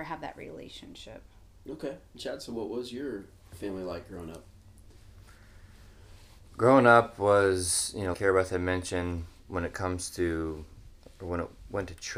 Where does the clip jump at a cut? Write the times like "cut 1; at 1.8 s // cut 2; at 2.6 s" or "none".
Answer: cut 1; at 2.1 s // cut 2; at 8.1 s